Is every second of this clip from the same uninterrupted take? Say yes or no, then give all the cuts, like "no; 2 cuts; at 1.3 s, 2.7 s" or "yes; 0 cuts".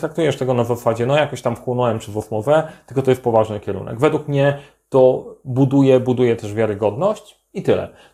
yes; 0 cuts